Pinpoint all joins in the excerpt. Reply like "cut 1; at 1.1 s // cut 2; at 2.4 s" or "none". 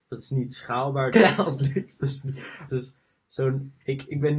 cut 1; at 1.1 s // cut 2; at 2.7 s